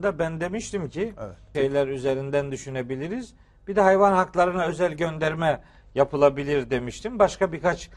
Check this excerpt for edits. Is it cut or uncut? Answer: cut